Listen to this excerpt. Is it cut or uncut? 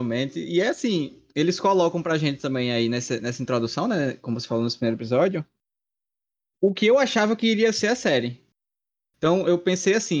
uncut